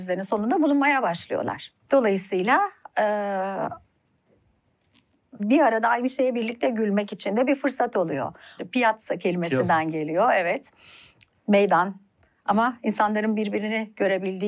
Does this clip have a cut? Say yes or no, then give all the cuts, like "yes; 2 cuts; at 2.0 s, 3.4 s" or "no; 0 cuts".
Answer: yes; 3 cuts; at 1.8 s, 5.4 s, 8.6 s